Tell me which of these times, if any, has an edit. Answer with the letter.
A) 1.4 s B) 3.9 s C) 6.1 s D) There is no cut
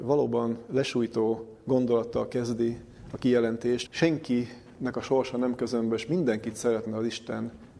B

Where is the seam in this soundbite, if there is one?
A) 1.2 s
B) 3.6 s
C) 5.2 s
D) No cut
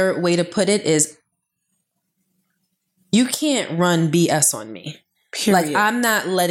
D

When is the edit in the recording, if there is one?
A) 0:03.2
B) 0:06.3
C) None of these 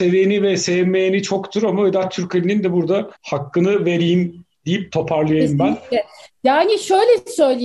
A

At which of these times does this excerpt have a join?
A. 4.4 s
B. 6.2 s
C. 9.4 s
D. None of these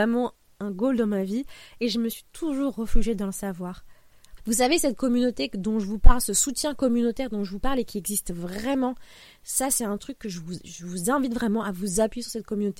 A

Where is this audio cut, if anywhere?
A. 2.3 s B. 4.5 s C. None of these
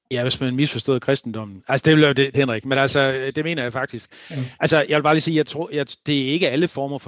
A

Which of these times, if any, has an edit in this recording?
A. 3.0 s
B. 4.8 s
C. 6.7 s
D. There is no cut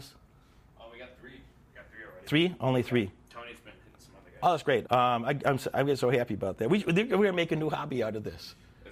B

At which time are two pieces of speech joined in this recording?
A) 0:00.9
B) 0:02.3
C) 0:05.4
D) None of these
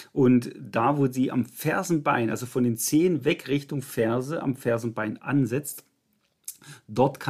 D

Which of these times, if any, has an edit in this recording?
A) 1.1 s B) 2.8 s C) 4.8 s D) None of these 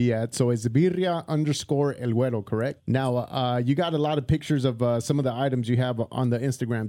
B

